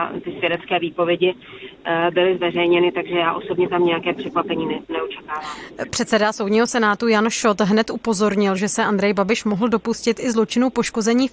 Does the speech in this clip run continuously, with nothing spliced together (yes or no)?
yes